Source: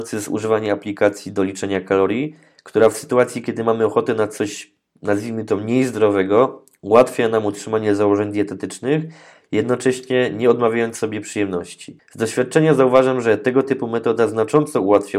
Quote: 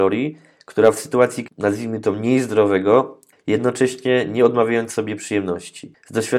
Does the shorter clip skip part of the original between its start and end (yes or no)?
yes